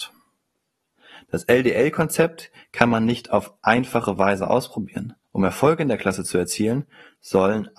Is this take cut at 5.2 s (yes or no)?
yes